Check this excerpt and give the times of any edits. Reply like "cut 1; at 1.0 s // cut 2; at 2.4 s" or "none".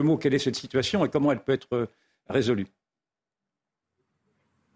none